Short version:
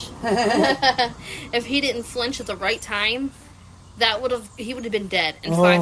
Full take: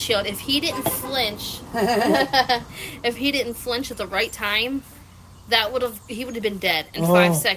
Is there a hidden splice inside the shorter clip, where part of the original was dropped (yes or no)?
no